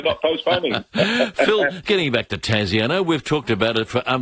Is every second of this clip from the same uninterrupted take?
no; 1 cut; at 1.9 s

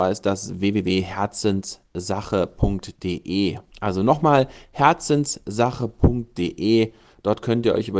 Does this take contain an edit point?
no; 0 cuts

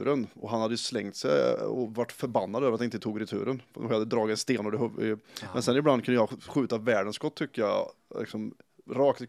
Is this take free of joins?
yes; 0 cuts

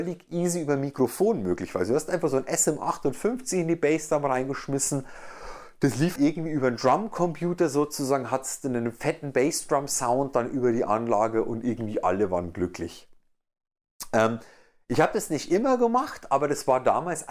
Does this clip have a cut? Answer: yes; 1 cut; at 6.2 s

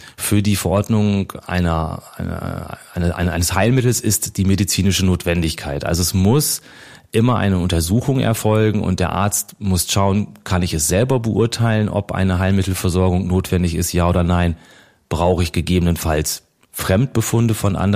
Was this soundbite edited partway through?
no; 0 cuts

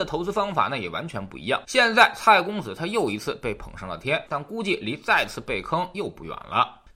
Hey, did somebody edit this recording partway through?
yes; 2 cuts; at 1.6 s, 4.3 s

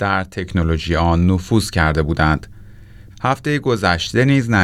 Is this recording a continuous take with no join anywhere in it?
no; 1 cut; at 3.1 s

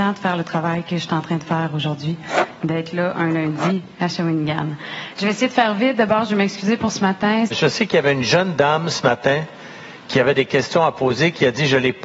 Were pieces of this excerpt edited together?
yes; 2 cuts; at 5.1 s, 7.5 s

